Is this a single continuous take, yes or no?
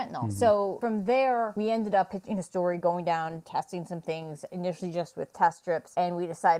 yes